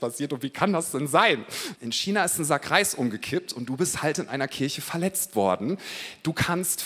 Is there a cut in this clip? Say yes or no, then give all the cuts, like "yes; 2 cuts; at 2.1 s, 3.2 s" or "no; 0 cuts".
yes; 1 cut; at 1.7 s